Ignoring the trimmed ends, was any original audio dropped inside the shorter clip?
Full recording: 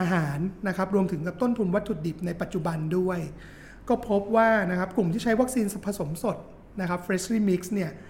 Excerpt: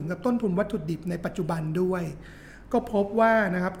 no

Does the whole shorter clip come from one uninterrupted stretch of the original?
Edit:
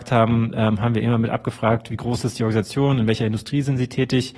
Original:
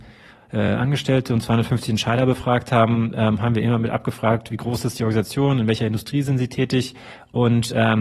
yes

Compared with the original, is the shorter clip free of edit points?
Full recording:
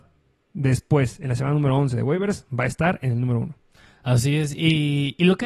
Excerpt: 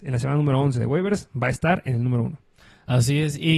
yes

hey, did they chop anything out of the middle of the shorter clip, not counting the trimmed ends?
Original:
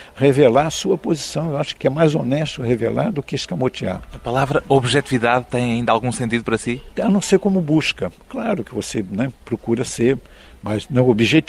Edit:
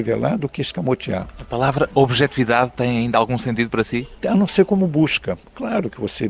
no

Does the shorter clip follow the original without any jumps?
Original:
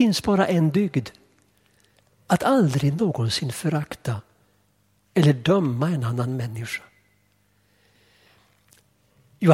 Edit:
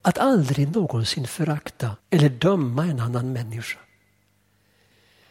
no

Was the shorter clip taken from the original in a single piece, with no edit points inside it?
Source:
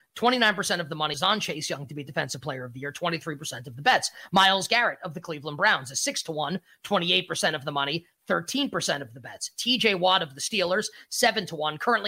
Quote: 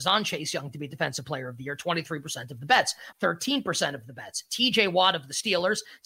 no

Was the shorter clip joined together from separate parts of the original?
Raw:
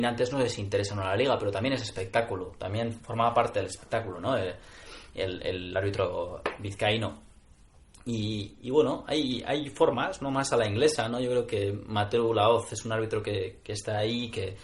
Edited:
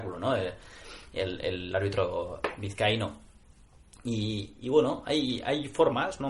no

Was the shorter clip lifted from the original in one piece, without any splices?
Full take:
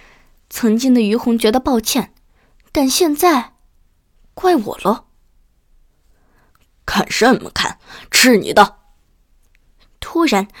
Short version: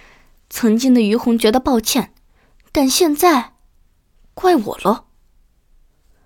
yes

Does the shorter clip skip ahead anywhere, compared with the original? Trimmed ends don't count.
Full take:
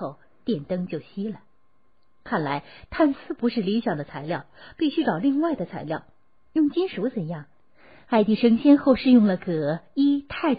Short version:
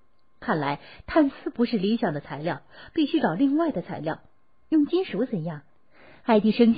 no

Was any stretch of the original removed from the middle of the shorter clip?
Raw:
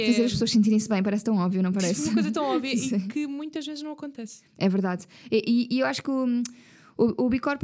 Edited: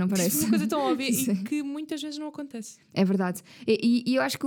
no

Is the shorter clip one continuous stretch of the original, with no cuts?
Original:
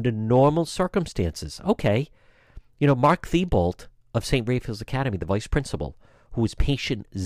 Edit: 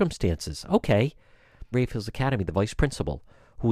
no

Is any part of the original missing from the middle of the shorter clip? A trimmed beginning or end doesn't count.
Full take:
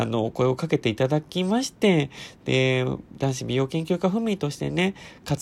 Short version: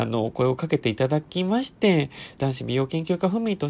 yes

